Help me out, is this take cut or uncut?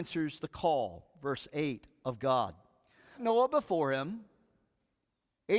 cut